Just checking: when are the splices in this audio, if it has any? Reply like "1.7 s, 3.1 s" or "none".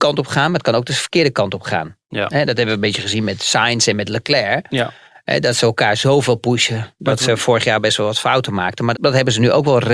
8.9 s

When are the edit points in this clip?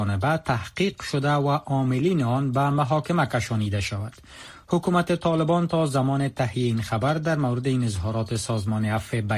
none

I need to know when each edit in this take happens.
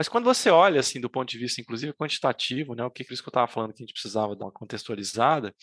3.0 s, 4.4 s

